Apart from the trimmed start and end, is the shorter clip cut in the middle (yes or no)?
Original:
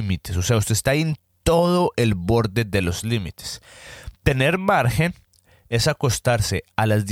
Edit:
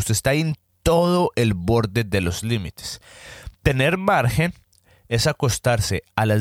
no